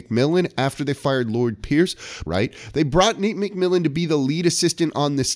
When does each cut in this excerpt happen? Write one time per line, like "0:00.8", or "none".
0:02.3